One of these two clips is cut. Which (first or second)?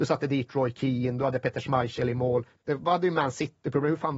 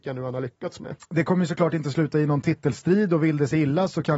first